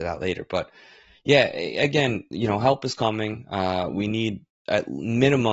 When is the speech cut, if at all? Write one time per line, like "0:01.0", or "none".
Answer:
none

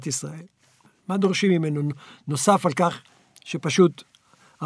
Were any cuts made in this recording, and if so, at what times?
none

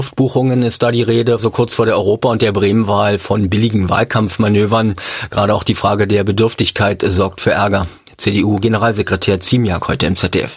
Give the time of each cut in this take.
0:01.4

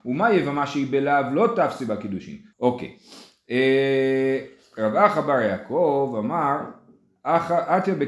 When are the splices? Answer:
0:02.5

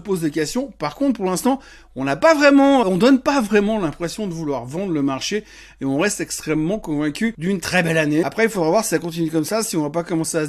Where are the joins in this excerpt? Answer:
0:02.8
0:08.2

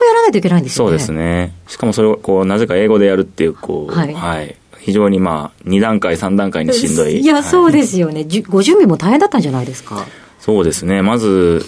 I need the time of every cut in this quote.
none

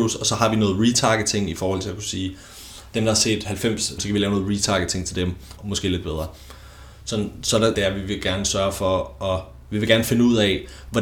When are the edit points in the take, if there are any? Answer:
0:04.0
0:05.6
0:07.7

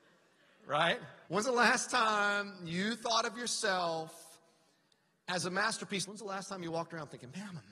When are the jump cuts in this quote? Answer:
0:01.3
0:06.1

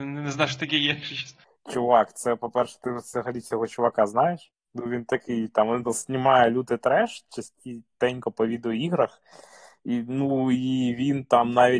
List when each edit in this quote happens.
0:05.8

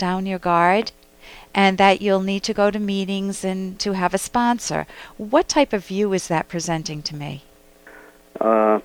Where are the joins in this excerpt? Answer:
none

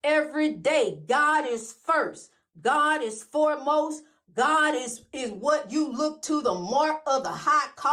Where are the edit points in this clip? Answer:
none

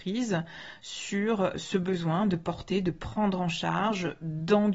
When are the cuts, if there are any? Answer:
0:01.5

